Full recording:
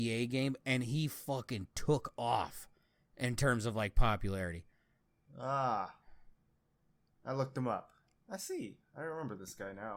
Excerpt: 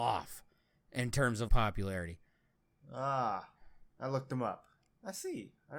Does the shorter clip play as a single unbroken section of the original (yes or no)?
no